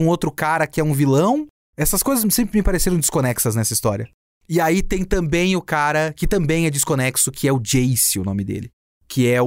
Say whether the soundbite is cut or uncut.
uncut